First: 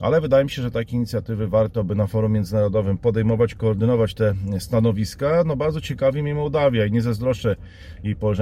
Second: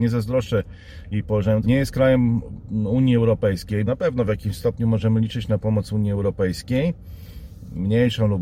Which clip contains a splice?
second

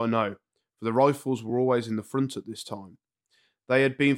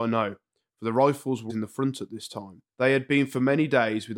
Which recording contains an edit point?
second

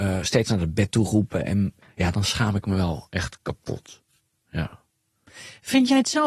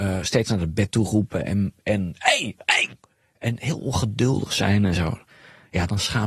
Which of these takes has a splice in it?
first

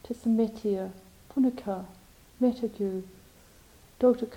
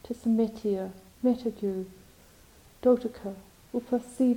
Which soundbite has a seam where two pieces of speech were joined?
second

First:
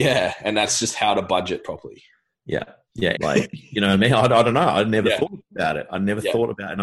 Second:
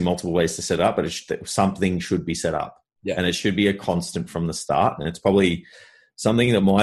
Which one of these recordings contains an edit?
first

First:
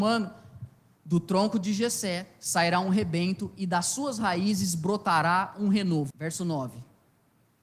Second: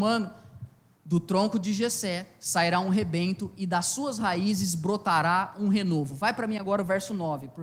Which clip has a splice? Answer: first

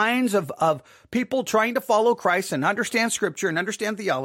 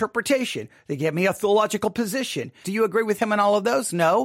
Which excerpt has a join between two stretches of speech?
second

